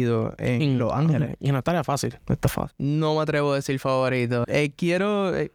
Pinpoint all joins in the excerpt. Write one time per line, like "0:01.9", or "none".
0:02.7
0:04.4